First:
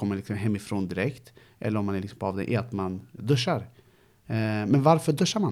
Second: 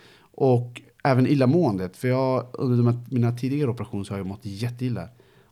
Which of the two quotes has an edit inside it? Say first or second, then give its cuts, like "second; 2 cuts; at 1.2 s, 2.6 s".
first; 1 cut; at 3.2 s